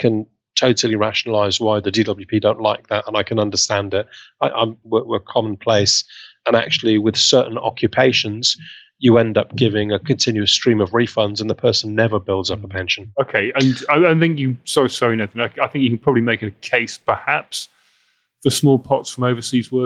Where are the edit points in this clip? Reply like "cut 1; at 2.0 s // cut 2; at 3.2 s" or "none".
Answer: cut 1; at 4.8 s